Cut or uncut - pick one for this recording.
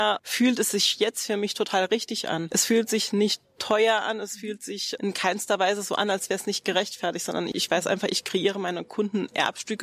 cut